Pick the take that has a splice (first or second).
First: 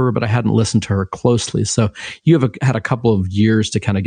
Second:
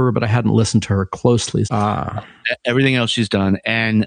second